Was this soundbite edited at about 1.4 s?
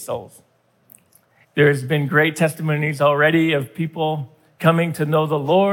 yes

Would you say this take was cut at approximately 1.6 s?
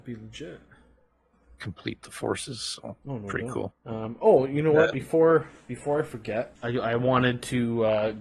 no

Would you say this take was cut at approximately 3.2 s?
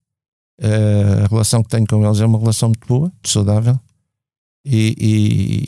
yes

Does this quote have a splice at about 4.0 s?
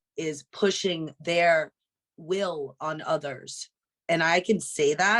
yes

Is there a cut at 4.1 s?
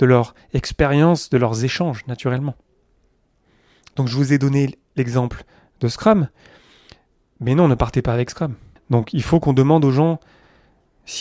no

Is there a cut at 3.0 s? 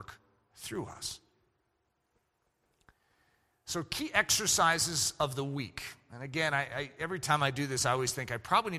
no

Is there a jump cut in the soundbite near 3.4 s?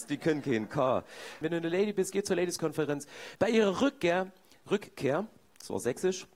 yes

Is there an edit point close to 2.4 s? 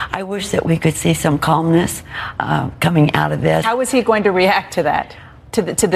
yes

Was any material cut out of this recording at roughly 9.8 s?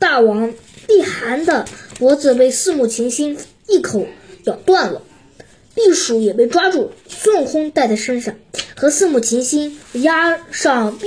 yes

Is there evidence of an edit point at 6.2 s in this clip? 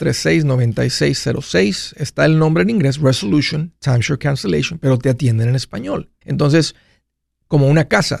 yes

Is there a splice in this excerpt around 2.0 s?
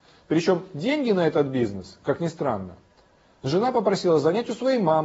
no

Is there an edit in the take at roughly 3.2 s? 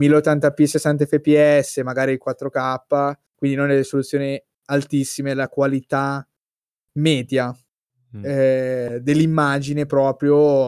no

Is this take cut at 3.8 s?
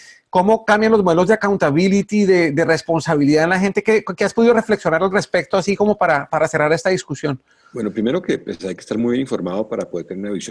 no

